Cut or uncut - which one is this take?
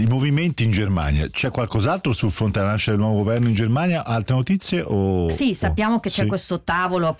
uncut